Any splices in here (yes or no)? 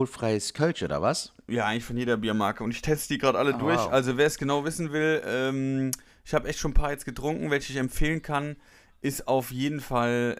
no